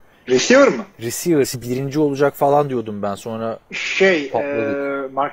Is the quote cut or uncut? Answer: uncut